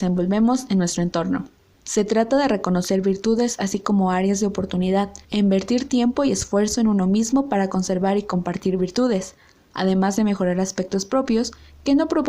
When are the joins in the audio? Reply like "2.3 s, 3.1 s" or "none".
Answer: 1.7 s, 5.2 s